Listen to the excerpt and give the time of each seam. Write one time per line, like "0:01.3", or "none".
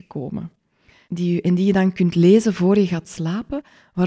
0:01.0